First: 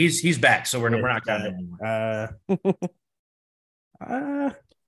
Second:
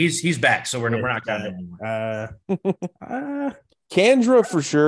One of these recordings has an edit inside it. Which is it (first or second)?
second